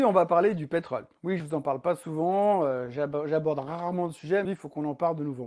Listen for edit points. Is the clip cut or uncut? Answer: cut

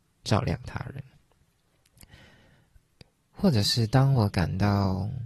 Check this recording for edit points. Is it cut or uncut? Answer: uncut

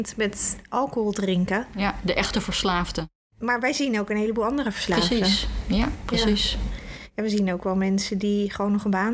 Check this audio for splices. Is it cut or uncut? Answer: uncut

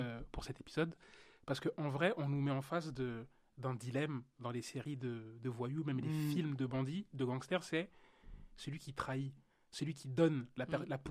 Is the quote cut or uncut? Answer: uncut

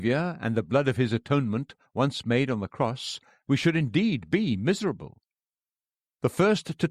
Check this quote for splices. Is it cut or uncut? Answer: cut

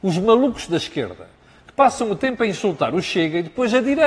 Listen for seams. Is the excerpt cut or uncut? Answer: uncut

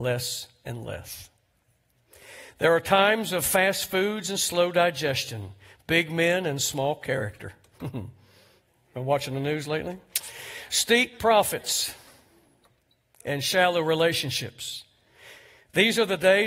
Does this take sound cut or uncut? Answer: uncut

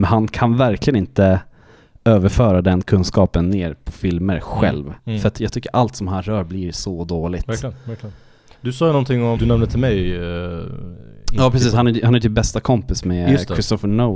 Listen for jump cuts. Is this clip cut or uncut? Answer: cut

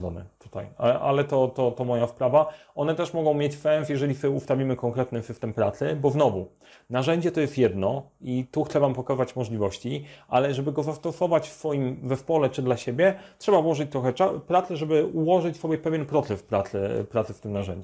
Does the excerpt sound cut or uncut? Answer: uncut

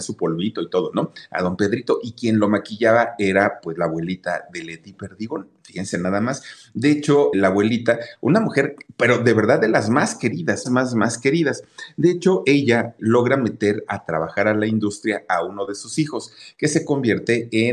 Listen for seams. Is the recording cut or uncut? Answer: cut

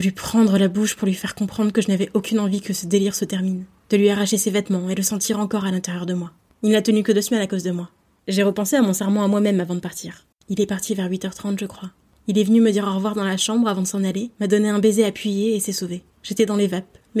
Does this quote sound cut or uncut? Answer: cut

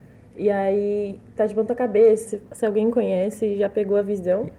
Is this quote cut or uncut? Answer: cut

